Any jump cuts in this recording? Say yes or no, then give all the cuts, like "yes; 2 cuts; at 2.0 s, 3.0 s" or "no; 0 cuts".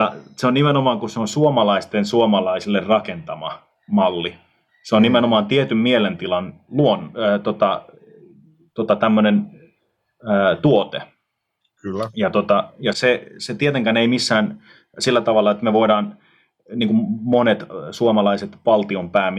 yes; 1 cut; at 12.9 s